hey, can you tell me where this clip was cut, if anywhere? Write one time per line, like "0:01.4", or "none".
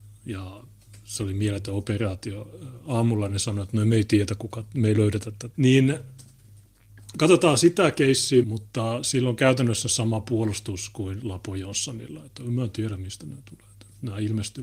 0:05.5
0:08.4